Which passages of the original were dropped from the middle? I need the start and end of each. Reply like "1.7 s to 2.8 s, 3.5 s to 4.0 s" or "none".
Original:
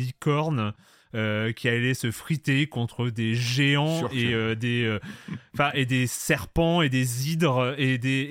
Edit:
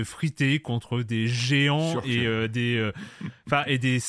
none